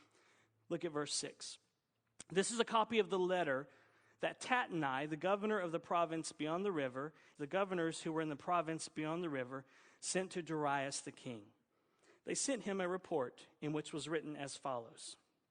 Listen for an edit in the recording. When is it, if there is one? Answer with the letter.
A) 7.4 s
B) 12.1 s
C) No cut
A